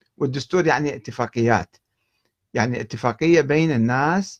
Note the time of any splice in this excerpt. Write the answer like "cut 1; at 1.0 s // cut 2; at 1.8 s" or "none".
none